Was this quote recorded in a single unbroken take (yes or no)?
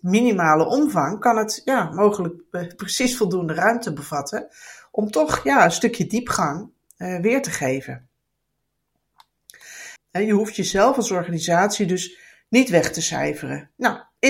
no